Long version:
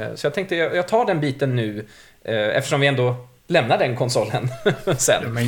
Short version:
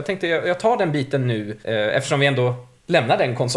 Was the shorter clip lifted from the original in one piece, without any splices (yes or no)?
no